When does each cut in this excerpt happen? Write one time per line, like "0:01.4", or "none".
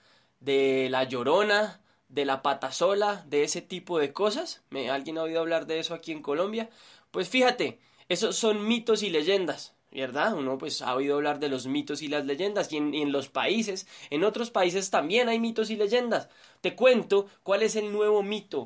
none